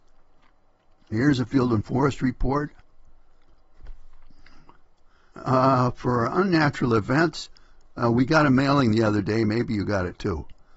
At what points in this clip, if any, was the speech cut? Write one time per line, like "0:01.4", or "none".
0:05.3